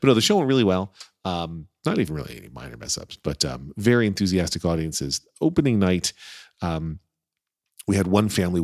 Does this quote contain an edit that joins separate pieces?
yes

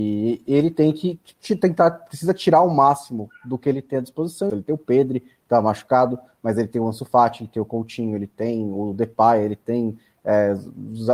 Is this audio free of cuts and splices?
no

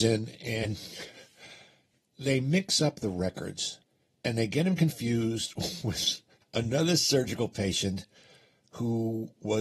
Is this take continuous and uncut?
yes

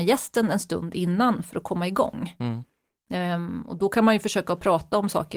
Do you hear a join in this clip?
no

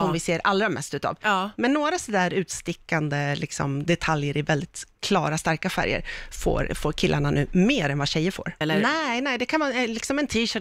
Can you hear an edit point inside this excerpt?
yes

